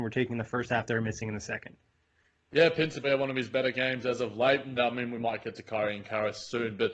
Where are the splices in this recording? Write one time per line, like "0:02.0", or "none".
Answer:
0:03.0
0:04.8